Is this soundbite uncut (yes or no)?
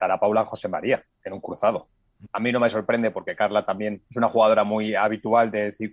no